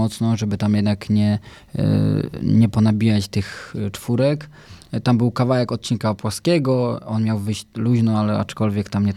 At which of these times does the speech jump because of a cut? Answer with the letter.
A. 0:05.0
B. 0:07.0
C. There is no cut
C